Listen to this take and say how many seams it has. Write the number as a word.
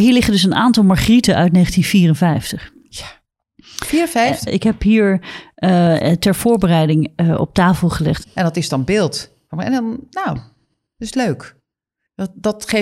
two